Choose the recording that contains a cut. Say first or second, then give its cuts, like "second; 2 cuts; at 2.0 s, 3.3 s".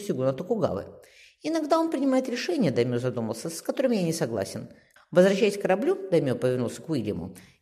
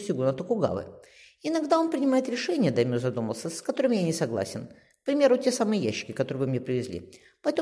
first; 1 cut; at 5.0 s